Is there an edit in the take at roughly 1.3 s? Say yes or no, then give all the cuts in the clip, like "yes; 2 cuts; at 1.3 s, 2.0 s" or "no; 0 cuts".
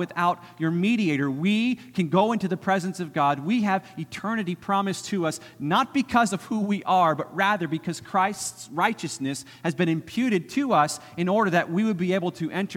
no; 0 cuts